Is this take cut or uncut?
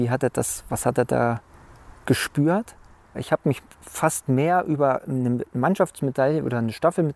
cut